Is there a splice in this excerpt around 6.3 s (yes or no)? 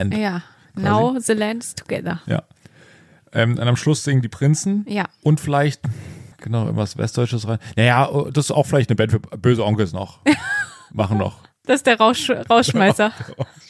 yes